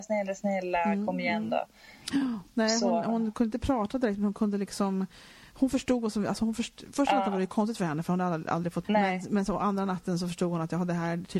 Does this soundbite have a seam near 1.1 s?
no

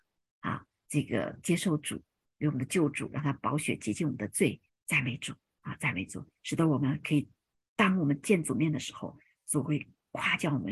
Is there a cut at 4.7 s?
yes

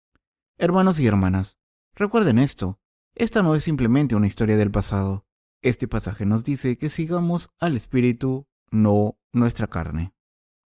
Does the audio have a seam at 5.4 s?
yes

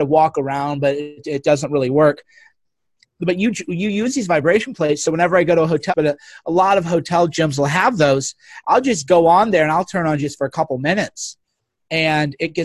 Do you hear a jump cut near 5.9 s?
yes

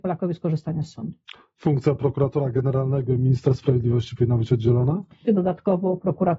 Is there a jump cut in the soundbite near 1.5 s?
no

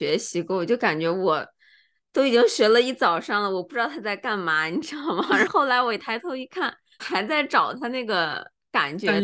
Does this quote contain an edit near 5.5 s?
yes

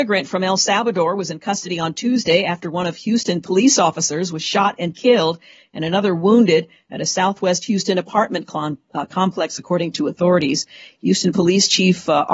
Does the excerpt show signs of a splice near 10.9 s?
no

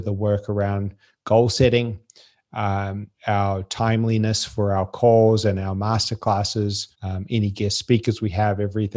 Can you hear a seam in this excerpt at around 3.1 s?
yes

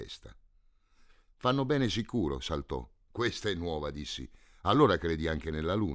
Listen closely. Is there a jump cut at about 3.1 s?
yes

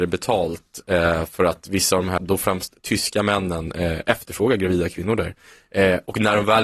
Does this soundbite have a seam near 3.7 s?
no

